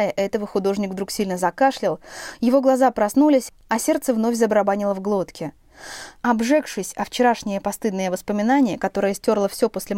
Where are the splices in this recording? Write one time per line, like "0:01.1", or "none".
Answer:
0:06.2